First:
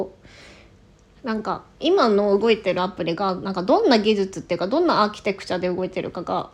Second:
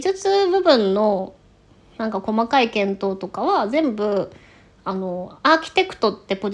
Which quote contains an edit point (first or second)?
first